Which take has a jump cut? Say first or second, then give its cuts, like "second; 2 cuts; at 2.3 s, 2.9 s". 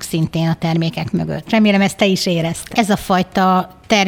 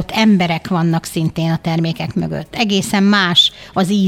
first; 2 cuts; at 1.5 s, 2.7 s